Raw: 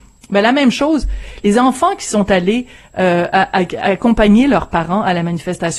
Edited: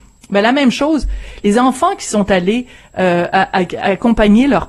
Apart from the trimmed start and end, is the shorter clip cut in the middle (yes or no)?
no